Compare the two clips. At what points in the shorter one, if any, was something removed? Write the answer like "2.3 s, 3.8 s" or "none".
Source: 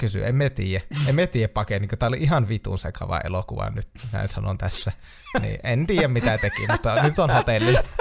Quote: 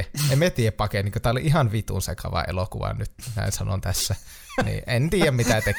none